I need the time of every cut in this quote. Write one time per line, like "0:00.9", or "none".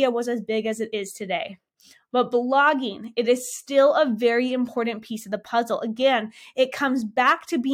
none